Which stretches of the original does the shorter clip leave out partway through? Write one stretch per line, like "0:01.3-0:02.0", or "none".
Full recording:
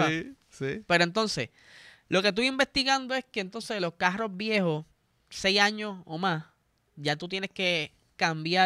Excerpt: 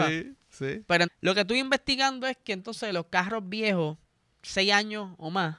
0:01.1-0:01.9

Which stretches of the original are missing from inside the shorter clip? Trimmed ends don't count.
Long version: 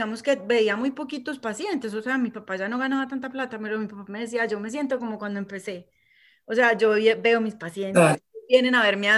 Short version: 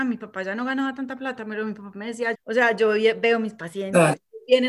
0:04.5-0:06.3

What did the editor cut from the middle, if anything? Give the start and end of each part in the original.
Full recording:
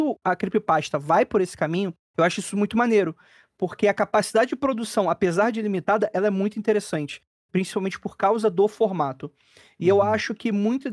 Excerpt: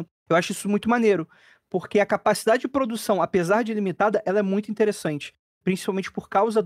none

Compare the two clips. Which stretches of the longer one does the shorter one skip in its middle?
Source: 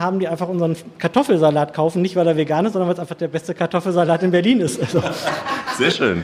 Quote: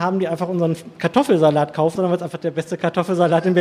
0:02.0-0:02.7

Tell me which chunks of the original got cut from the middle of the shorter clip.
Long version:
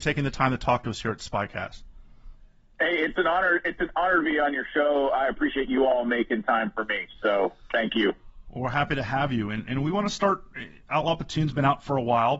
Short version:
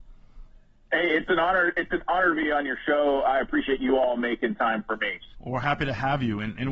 0:07.2-0:08.4

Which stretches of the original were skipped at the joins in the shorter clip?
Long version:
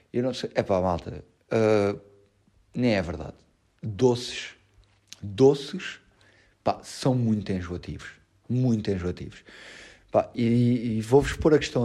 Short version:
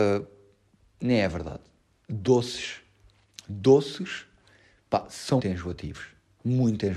0:07.1-0:07.4

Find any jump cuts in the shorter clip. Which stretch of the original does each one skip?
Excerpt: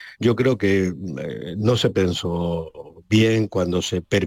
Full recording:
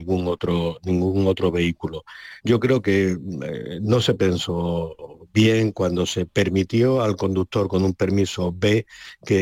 none

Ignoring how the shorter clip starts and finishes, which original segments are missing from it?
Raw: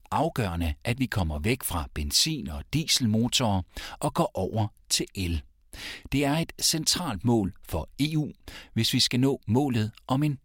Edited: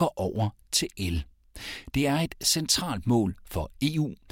none

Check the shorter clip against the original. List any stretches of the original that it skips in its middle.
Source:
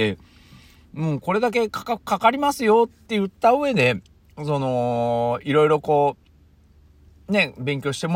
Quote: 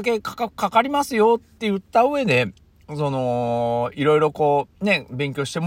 0:06.2-0:07.2

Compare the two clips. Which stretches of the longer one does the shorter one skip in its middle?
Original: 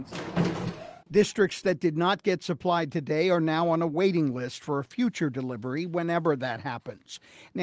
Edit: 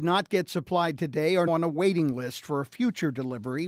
0:03.4-0:03.7

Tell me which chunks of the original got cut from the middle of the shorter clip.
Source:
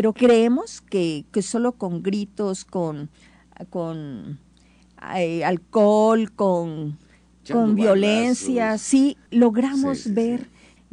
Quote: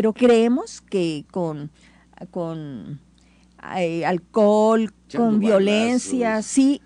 0:01.3-0:02.6
0:06.3-0:07.3

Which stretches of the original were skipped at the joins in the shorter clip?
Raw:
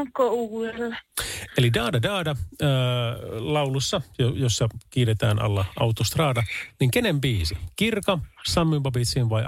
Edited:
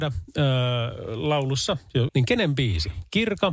0:04.3-0:06.7

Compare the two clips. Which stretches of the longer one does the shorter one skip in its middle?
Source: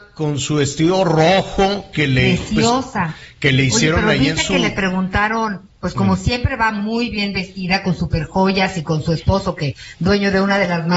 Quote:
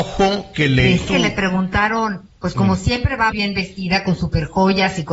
0:02.5-0:04.5
0:06.7-0:07.1

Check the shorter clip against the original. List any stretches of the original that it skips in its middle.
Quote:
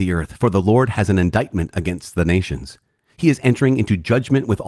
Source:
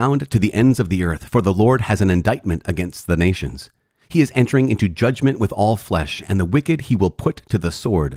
none

